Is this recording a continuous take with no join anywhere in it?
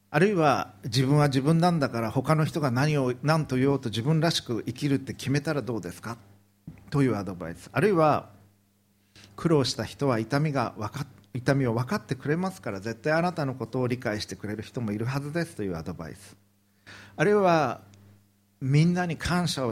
yes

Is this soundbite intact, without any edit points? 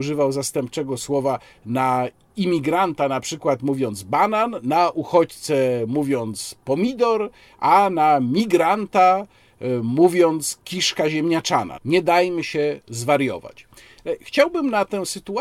yes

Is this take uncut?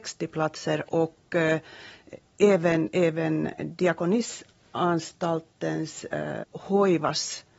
no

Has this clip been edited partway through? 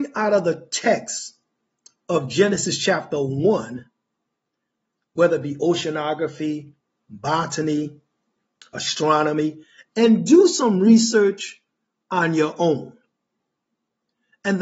no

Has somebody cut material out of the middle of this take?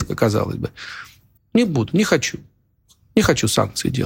yes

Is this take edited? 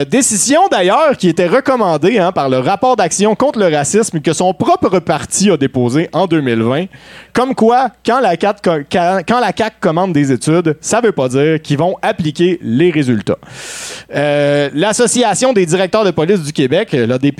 no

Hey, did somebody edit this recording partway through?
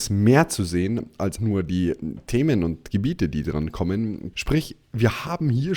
yes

